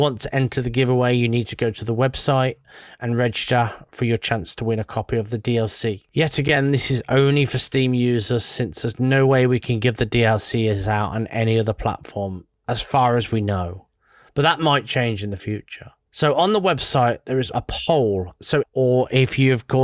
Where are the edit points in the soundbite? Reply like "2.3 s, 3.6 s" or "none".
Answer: 17.5 s, 18.6 s